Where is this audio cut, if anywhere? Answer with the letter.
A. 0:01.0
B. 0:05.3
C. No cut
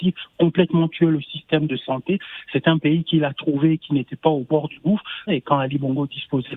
B